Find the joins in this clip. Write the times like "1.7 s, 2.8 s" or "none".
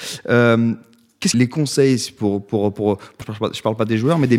1.3 s, 3.2 s

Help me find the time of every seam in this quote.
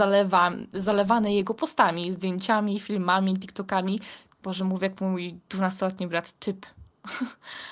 4.4 s

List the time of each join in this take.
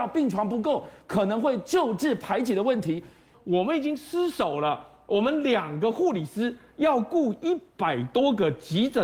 3.3 s

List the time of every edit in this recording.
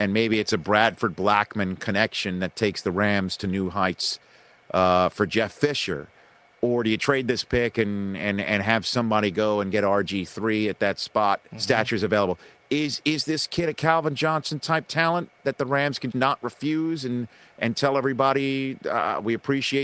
11.5 s, 16.1 s

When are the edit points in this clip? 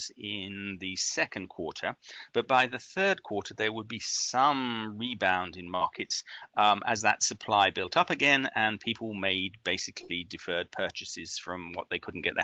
none

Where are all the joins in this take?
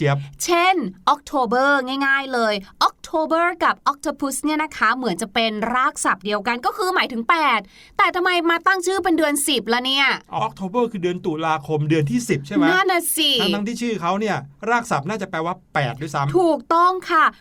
10.4 s, 12.8 s

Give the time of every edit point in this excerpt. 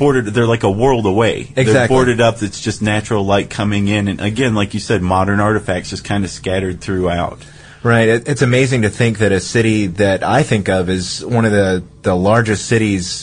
none

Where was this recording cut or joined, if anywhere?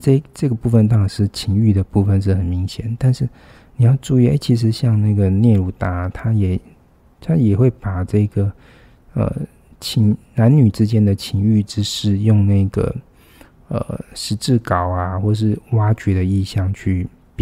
none

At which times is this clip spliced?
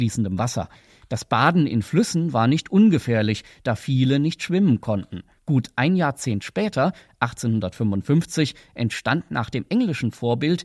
5.4 s

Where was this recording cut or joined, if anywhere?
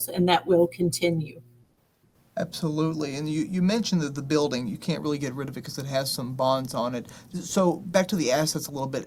none

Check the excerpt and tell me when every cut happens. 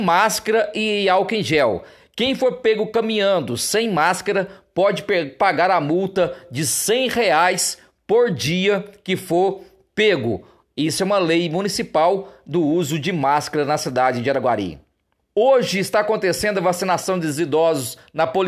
15.2 s

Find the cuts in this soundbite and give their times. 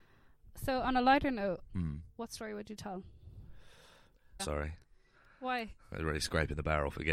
1.7 s, 4.4 s

